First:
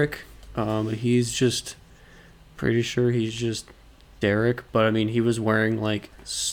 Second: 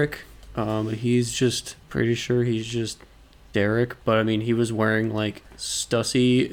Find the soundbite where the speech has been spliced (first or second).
second